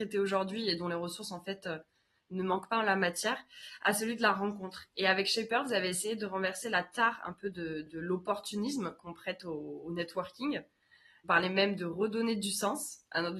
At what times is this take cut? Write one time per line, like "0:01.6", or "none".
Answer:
none